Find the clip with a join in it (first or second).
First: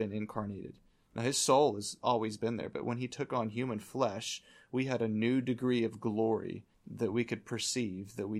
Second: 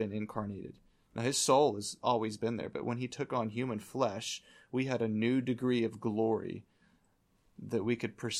first